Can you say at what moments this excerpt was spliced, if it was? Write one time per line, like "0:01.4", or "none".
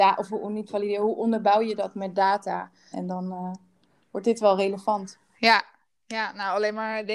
0:02.9